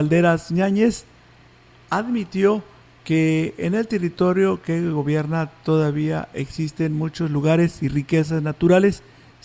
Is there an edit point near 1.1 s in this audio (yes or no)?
no